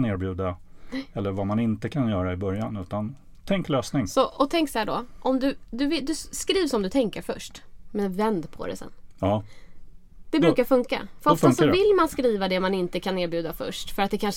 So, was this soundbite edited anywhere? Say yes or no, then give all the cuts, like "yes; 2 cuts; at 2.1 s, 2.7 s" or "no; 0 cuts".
no; 0 cuts